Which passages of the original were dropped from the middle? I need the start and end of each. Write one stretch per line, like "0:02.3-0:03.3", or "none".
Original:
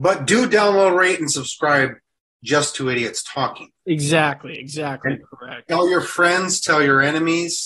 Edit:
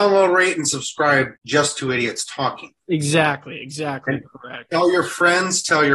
0:02.0-0:02.3